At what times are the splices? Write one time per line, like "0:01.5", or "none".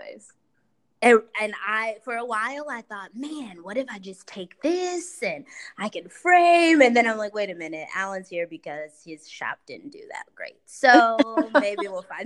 none